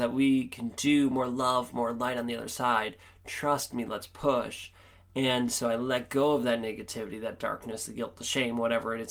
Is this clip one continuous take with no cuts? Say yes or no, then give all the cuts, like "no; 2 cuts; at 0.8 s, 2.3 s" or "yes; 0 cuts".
yes; 0 cuts